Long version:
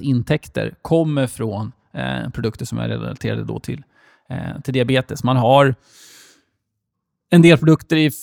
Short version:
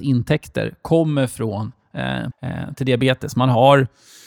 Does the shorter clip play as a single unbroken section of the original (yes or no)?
no